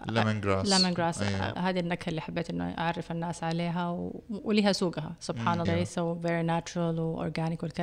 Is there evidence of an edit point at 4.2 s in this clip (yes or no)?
no